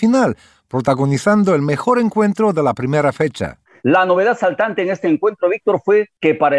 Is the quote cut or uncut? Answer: uncut